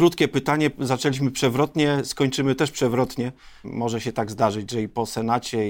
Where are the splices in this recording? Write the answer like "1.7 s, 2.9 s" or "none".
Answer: 3.6 s